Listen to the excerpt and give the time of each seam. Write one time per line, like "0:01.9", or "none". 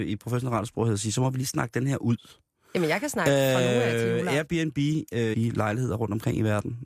0:05.3

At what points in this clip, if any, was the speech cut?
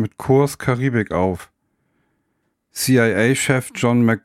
0:02.5

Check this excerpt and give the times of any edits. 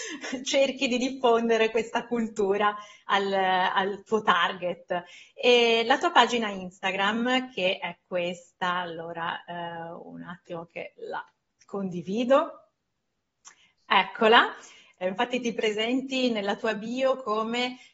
0:15.0

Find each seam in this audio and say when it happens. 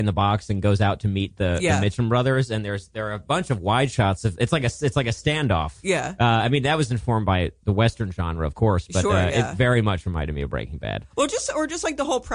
none

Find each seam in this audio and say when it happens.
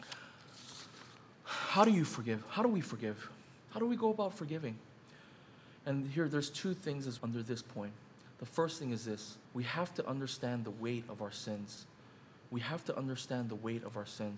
0:07.2
0:09.4

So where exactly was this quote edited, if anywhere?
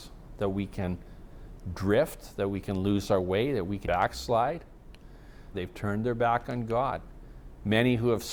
0:03.8
0:05.5

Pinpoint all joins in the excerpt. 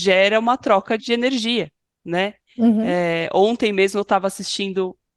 0:01.0

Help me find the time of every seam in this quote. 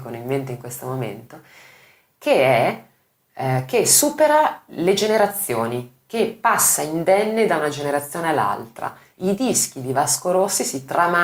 none

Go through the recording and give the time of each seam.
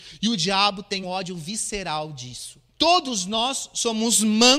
0:01.0
0:02.7

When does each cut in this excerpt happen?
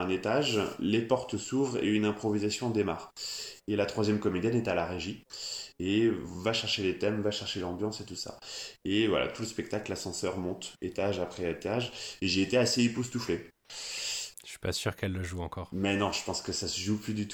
0:13.6

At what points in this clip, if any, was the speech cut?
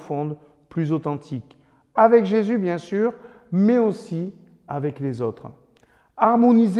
none

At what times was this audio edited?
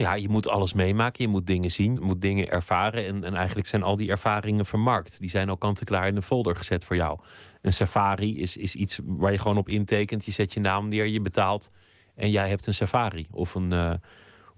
0:02.0

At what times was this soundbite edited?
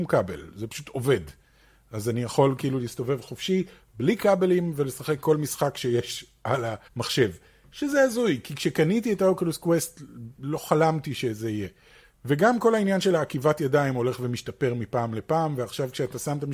0:06.9

